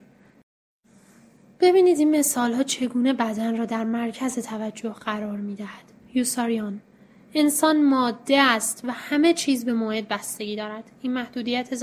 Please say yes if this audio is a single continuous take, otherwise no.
no